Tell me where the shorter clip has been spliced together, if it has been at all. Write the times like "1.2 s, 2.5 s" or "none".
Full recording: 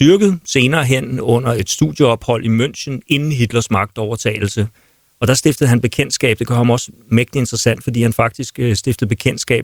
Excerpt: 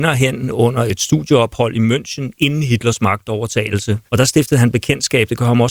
4.1 s